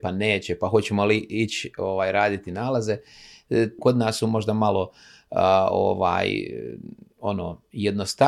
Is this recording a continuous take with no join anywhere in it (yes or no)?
no